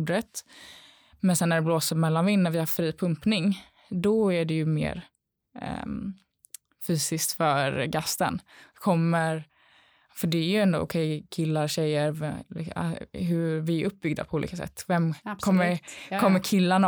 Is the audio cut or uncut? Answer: uncut